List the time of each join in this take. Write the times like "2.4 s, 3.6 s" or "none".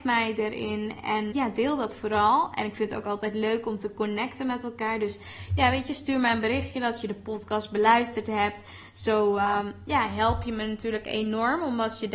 1.3 s